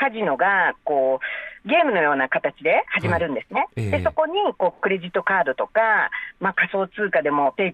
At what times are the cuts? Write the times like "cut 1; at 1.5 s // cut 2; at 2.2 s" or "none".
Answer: none